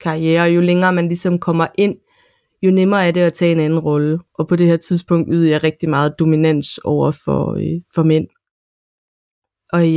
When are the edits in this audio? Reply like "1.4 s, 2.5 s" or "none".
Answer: none